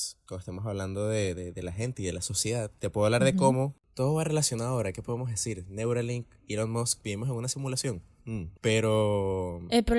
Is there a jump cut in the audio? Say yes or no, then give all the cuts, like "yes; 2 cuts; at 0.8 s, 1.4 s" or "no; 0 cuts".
no; 0 cuts